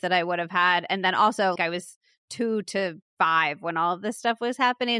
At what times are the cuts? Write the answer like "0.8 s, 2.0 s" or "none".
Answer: 1.6 s